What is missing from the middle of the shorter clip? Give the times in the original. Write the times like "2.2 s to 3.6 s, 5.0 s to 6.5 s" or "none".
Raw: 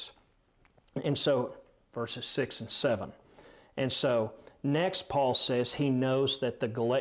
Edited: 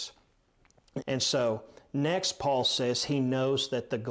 1.0 s to 3.7 s